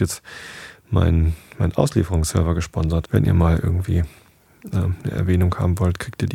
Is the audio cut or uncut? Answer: cut